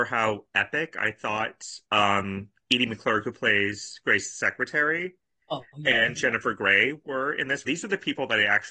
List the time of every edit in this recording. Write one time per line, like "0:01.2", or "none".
0:07.6